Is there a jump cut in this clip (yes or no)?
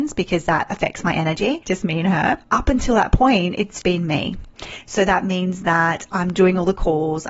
yes